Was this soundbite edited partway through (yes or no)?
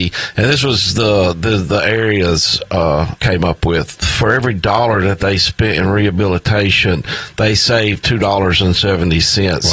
yes